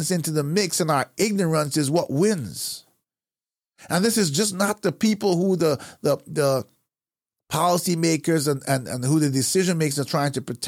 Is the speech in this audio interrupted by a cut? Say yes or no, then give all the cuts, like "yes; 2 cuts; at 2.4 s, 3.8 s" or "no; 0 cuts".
no; 0 cuts